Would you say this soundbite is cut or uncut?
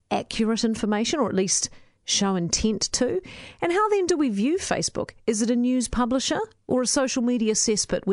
uncut